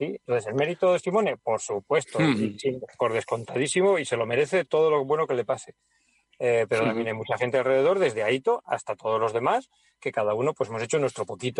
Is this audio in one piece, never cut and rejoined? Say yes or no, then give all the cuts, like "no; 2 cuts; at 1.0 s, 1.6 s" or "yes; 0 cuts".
yes; 0 cuts